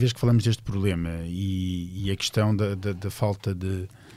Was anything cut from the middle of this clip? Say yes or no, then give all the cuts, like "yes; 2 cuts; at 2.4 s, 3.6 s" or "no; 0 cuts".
no; 0 cuts